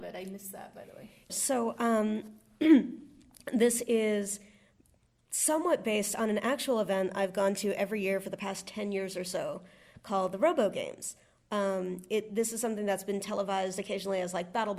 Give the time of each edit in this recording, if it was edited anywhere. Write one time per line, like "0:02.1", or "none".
0:01.3

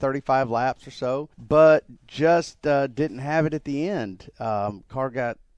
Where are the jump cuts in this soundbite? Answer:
0:01.3

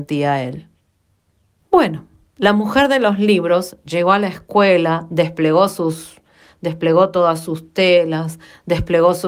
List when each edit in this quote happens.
0:01.6

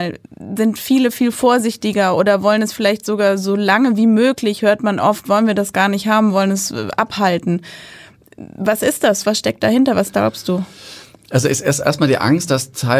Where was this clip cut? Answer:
none

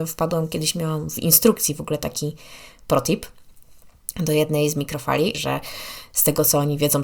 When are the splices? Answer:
0:05.3

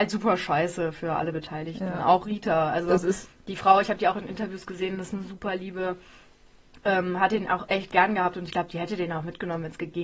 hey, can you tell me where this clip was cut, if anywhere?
none

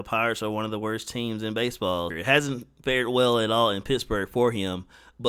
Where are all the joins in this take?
0:02.1

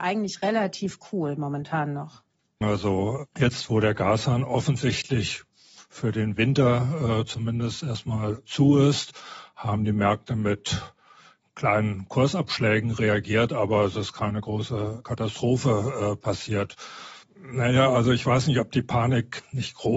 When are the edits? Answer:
0:02.6
0:17.2

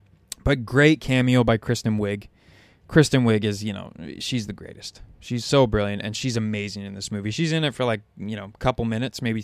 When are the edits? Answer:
none

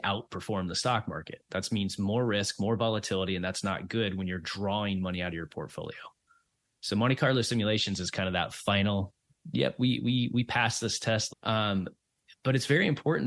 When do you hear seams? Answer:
0:11.3

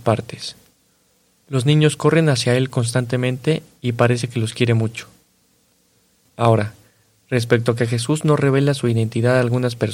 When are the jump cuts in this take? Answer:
none

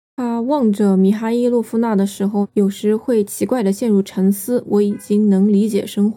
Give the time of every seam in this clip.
0:04.6

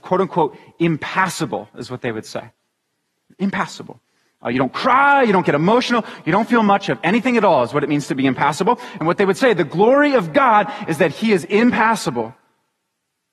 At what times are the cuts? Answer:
0:03.3

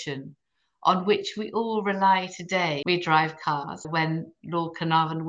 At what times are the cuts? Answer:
0:02.8
0:03.8

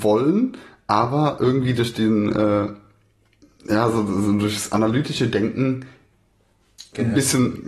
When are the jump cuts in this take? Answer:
none

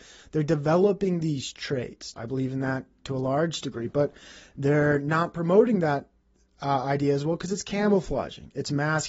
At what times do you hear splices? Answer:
0:02.1

